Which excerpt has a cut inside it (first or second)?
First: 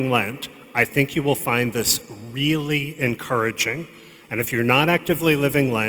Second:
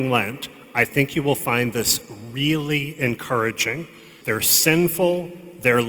second